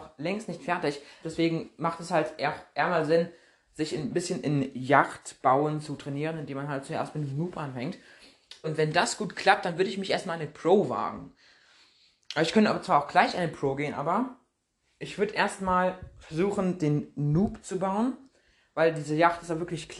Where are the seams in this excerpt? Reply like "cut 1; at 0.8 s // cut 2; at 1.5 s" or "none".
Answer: cut 1; at 1.2 s // cut 2; at 8.6 s